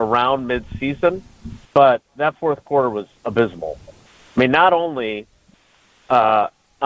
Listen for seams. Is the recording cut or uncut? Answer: cut